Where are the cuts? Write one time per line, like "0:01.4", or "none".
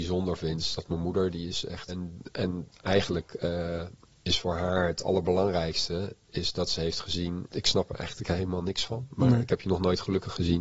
0:01.9
0:07.5